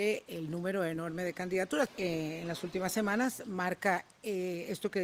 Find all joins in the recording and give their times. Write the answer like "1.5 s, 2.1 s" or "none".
1.9 s